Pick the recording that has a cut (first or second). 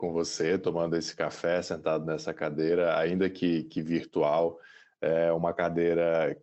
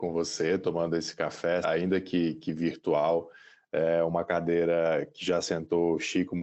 second